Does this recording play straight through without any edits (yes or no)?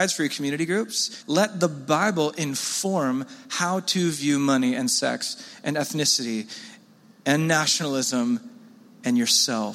no